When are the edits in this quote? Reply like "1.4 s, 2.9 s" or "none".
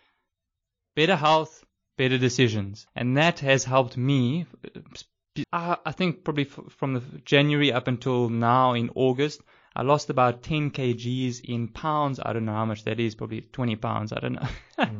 2.9 s, 5.4 s